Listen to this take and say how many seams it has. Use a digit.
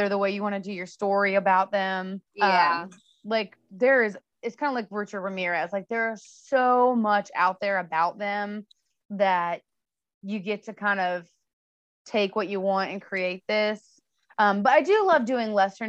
1